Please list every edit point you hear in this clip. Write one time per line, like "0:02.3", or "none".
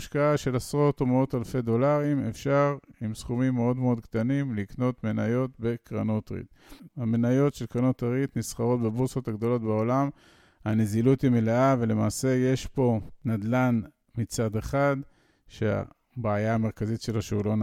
0:06.9